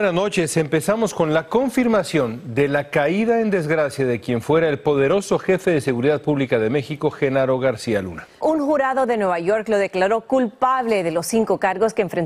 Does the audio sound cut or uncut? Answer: cut